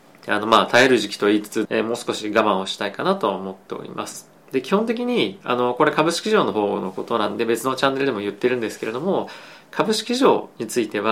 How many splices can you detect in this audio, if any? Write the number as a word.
one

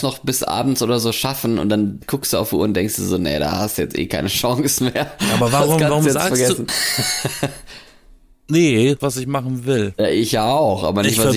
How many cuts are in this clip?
two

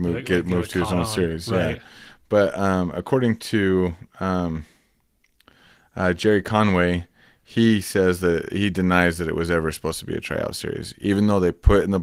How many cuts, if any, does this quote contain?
zero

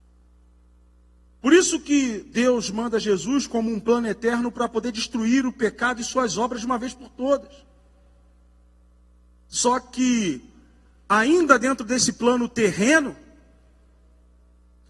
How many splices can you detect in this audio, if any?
one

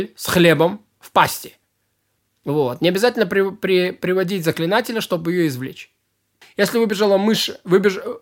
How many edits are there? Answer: one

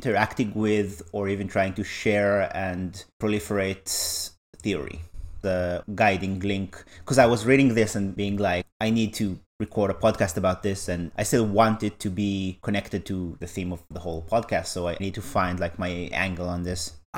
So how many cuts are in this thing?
one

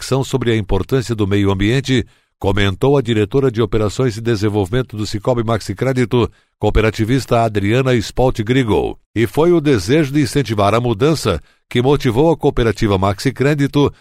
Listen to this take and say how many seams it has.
zero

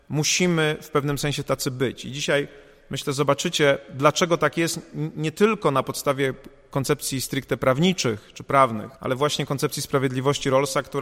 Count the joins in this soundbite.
one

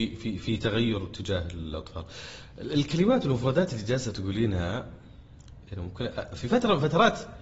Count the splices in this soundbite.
zero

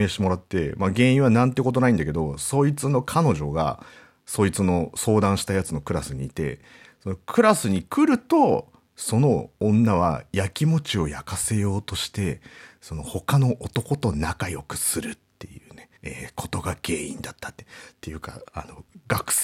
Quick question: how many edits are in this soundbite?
one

